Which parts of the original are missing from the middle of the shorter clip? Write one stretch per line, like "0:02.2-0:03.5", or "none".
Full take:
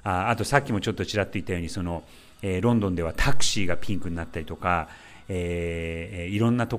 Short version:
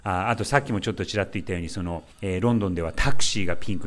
0:02.1-0:02.3